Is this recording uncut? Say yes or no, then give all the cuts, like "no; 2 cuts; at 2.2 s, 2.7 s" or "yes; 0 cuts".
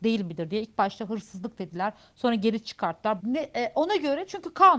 no; 1 cut; at 3.2 s